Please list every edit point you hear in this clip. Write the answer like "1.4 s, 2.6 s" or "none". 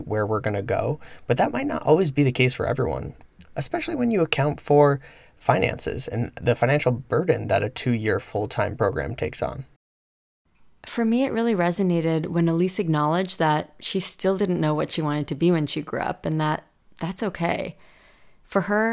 none